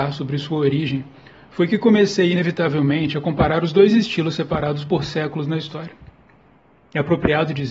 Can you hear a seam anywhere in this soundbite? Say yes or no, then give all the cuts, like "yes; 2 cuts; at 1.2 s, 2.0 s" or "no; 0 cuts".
no; 0 cuts